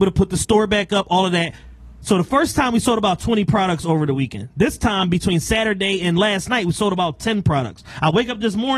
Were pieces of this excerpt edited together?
no; 0 cuts

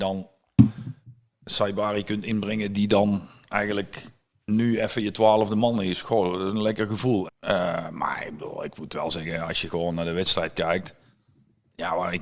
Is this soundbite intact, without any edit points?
no; 1 cut; at 7.3 s

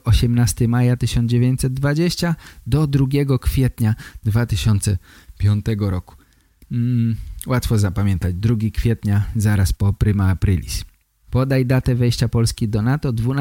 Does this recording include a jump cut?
yes; 1 cut; at 11.2 s

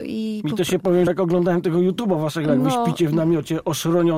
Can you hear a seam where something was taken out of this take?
yes; 1 cut; at 1.1 s

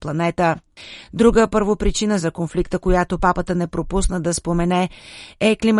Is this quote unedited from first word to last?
yes; 0 cuts

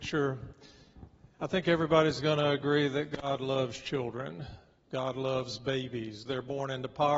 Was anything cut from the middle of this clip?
yes; 1 cut; at 6.3 s

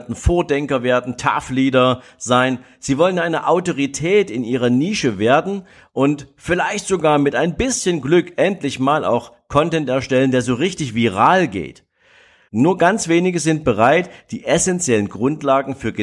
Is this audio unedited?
no; 1 cut; at 12.5 s

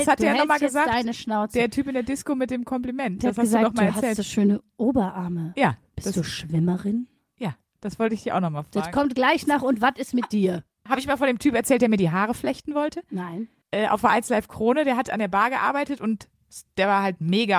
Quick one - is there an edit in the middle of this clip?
no; 0 cuts

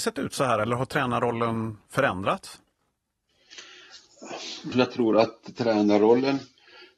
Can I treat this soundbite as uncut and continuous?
no; 1 cut; at 4.7 s

